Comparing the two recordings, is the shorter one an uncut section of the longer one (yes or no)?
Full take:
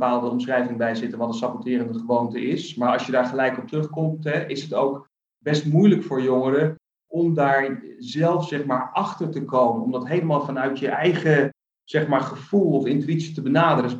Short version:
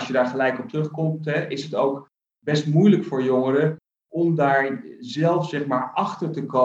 yes